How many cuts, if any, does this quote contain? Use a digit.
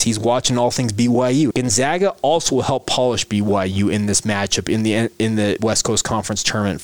1